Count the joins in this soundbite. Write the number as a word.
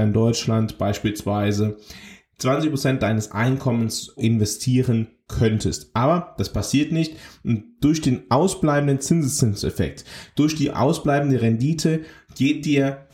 one